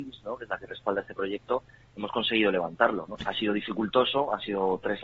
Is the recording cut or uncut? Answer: cut